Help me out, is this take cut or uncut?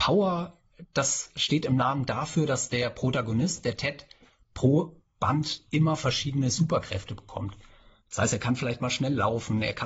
uncut